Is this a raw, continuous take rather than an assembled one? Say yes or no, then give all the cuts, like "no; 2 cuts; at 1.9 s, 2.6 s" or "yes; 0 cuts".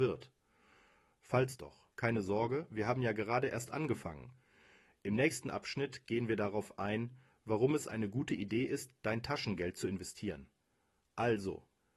yes; 0 cuts